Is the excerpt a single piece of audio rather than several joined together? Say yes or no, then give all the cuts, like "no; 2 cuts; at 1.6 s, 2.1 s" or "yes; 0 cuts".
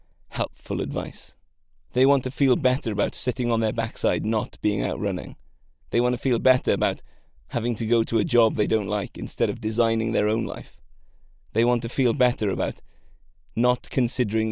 yes; 0 cuts